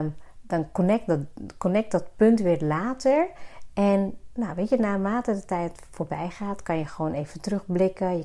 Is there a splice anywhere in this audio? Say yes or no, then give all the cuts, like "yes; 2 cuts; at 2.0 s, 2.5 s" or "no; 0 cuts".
yes; 1 cut; at 3.7 s